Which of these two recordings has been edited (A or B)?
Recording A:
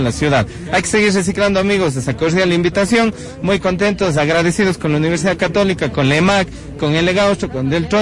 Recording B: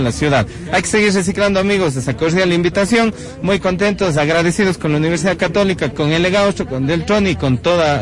B